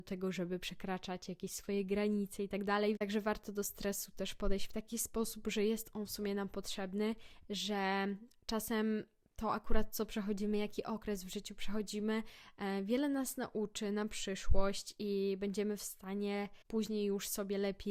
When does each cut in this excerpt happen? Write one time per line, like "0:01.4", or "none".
none